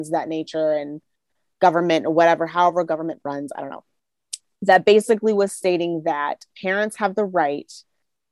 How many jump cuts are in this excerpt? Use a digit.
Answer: 0